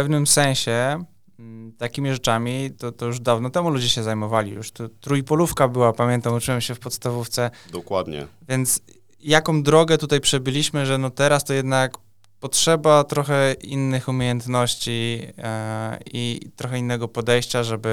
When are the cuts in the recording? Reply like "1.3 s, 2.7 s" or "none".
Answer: none